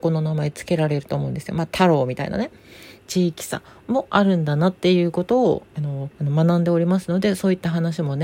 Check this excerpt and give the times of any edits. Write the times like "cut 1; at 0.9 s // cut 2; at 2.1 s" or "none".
cut 1; at 3.0 s // cut 2; at 6.1 s